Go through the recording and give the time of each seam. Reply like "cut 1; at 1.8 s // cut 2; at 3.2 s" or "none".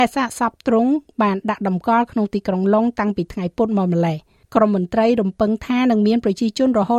cut 1; at 4.4 s